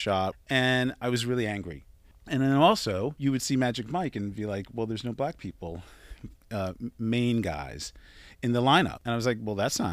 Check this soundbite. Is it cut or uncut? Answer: uncut